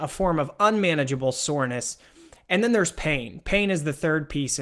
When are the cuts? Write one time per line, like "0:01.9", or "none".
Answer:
none